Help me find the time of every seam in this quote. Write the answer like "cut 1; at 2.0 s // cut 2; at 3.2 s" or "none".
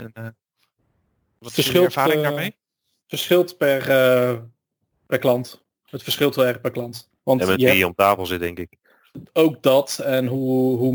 cut 1; at 7.2 s